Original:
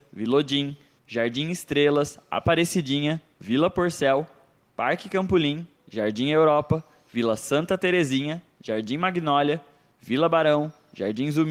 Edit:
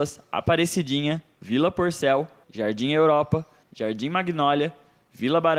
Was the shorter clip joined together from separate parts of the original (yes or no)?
yes